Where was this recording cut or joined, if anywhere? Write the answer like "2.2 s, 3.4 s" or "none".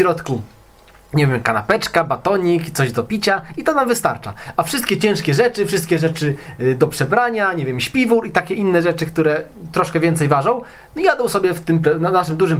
none